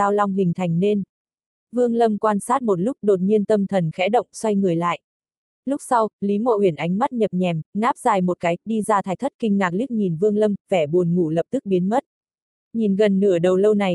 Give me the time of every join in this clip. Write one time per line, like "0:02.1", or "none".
0:12.6

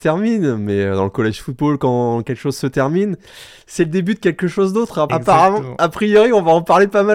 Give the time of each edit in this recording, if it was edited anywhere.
0:05.1

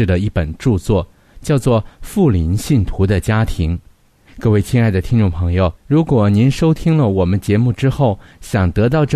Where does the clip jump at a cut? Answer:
0:04.3
0:05.8

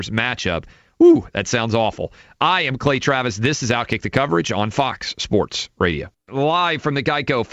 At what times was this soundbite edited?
none

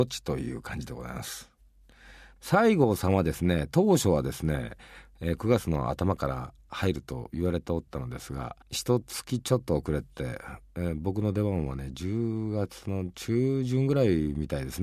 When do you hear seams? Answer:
0:08.6

